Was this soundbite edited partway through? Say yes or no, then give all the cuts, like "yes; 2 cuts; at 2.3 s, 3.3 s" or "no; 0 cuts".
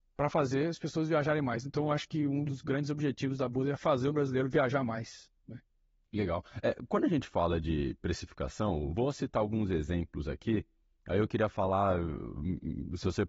no; 0 cuts